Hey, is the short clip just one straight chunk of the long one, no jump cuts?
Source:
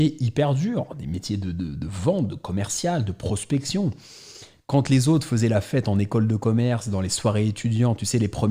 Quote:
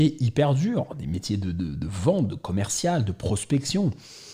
yes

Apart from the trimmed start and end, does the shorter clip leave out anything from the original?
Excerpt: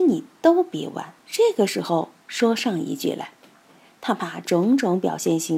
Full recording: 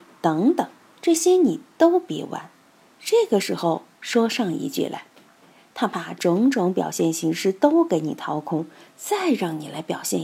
yes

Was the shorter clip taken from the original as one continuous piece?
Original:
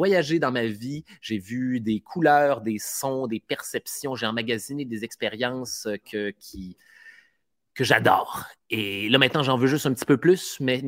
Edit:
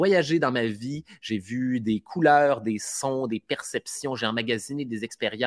yes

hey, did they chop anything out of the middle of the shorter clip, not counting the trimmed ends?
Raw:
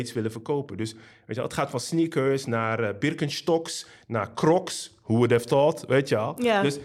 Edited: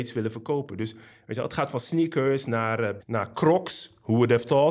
yes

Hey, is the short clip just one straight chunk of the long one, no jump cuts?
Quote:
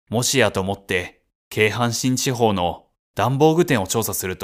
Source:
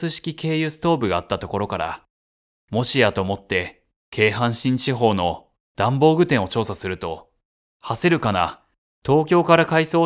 yes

